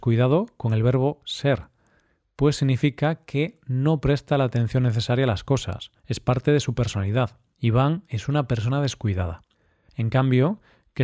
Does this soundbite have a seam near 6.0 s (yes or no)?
yes